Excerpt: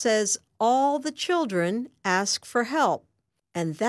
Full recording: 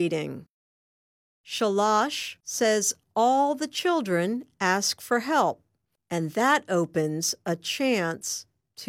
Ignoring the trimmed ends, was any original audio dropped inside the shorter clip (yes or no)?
no